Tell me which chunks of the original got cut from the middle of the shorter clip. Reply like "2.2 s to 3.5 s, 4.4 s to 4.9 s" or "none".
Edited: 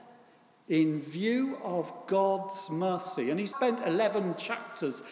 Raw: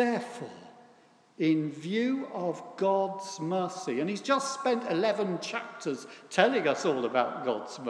4.2 s to 4.6 s

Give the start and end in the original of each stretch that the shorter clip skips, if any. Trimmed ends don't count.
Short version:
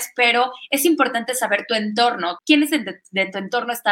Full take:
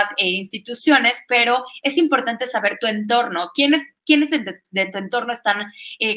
3.5 s to 4.0 s

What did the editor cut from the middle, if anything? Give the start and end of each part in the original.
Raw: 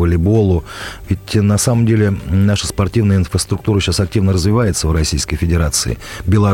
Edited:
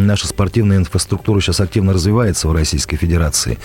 none

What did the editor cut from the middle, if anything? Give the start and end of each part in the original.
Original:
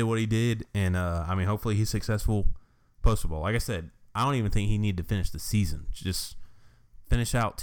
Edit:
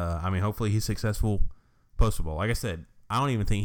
none

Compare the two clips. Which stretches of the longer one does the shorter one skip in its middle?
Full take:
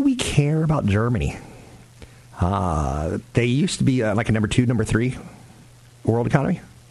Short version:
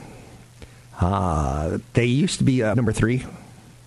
4.1 s to 4.7 s

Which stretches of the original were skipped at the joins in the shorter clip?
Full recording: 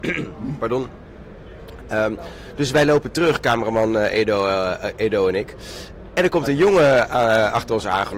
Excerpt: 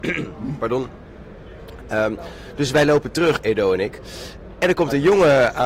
3.4 s to 5.0 s

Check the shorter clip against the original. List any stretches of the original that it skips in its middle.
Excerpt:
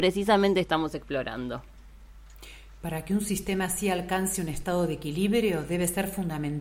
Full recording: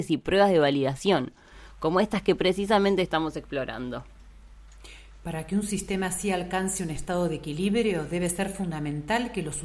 none

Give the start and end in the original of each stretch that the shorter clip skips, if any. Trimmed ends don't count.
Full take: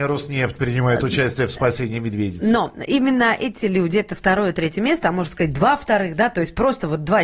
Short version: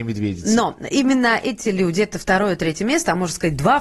none

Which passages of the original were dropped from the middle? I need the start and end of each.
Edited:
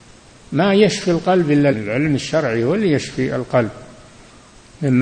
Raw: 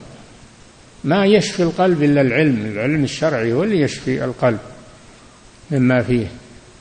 2.2 s to 2.6 s

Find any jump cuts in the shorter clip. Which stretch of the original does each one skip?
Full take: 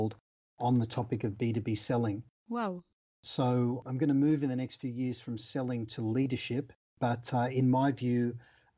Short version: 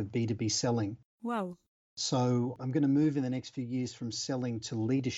none

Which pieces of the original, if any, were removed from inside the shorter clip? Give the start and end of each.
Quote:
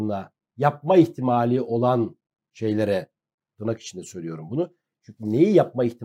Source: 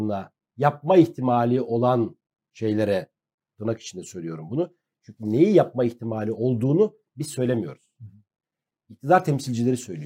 none

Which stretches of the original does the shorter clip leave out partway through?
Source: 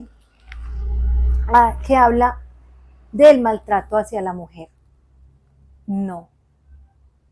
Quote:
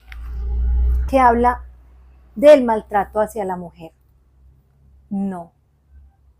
1.5 s to 1.9 s

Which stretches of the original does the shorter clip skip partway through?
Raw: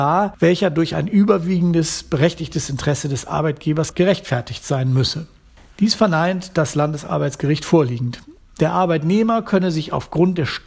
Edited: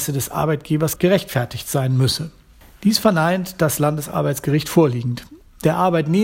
none

